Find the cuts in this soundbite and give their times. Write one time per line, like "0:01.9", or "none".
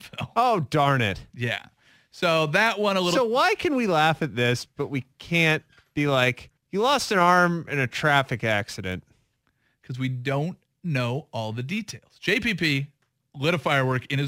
0:06.6